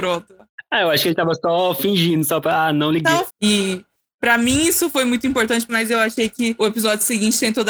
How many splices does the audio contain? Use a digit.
2